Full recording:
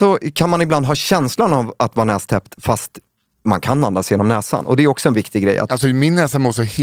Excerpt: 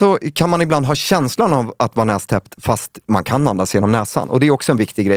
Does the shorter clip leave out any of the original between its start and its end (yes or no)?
yes